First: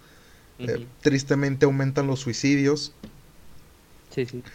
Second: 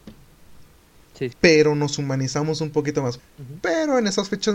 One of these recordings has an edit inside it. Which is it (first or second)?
second